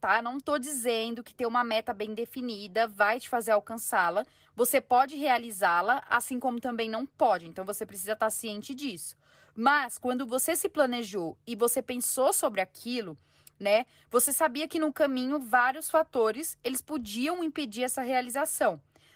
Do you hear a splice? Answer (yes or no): no